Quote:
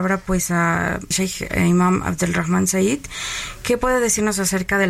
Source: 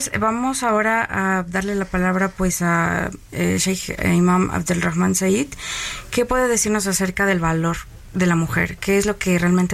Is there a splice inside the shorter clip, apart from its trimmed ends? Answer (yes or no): yes